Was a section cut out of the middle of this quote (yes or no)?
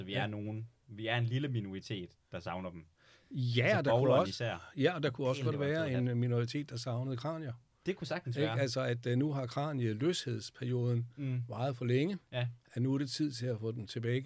no